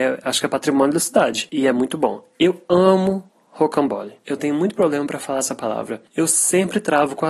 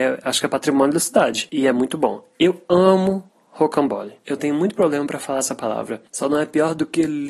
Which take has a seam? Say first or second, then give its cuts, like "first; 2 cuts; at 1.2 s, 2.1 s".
first; 1 cut; at 6.1 s